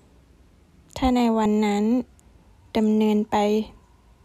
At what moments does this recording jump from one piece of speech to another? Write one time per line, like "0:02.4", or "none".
none